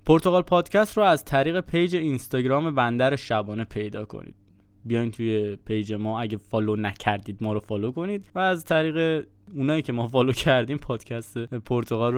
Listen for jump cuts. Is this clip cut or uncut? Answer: cut